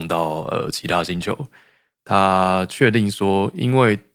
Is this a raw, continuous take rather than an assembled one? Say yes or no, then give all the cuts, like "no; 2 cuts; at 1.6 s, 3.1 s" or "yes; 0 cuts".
no; 1 cut; at 2.0 s